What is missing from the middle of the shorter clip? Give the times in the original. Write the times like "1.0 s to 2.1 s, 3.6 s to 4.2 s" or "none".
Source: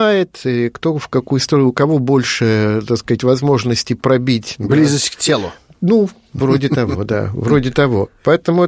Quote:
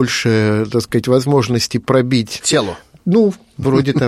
4.6 s to 5.2 s